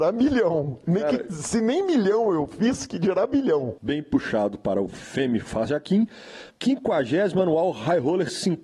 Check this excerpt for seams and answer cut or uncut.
cut